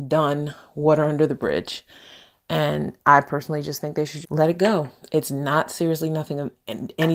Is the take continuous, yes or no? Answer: no